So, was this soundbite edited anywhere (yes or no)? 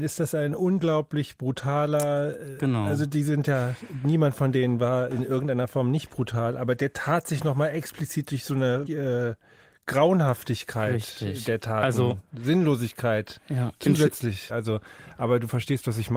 yes